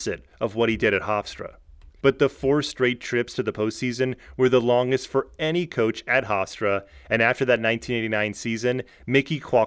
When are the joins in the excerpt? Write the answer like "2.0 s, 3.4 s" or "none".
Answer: 2.0 s